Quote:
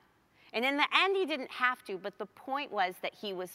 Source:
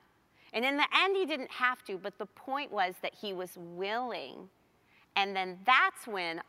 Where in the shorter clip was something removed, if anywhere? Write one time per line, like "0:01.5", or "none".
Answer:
none